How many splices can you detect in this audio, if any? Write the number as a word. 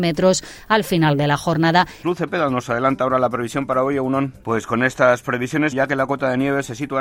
three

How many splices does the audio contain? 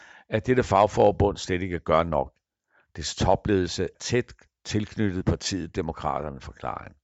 one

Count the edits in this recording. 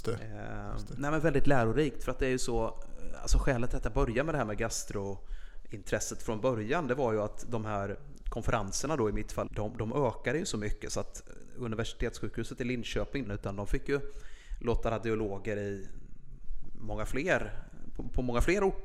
two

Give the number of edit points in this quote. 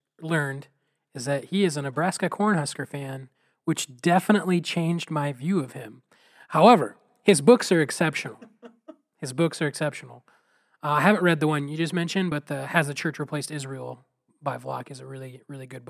zero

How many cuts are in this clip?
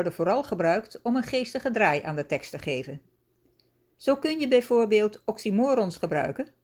one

